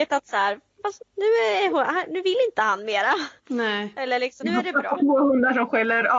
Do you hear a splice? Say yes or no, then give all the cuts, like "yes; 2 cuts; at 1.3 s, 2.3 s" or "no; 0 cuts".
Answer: yes; 2 cuts; at 1.0 s, 4.4 s